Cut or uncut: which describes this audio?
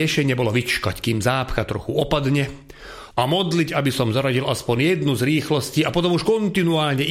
cut